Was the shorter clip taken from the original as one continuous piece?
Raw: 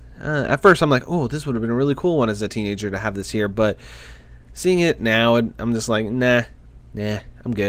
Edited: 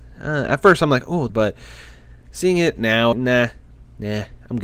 no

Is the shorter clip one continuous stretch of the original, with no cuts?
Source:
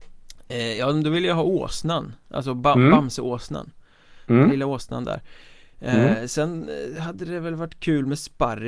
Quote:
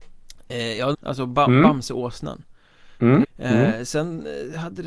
no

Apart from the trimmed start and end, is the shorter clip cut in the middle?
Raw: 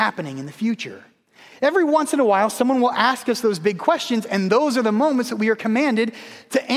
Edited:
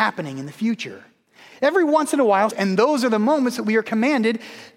yes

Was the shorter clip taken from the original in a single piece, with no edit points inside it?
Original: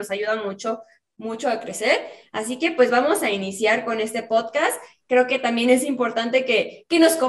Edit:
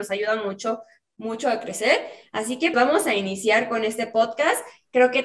no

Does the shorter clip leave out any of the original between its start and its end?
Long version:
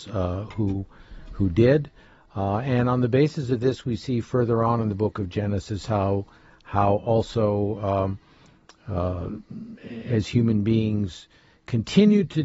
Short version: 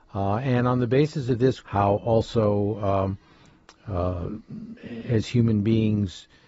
yes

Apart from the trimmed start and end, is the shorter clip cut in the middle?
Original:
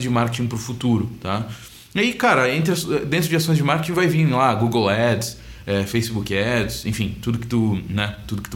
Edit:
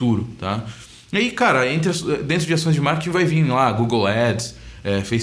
no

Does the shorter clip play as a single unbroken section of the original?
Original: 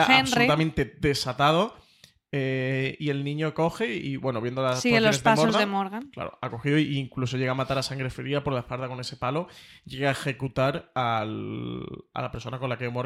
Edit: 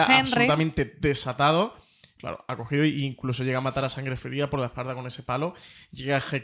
no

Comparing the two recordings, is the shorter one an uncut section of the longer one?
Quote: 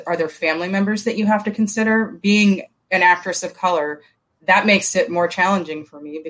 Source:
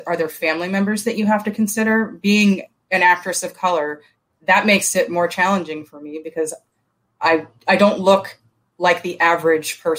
yes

